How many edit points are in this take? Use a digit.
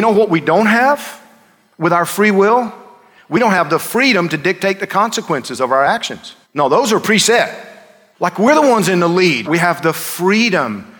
3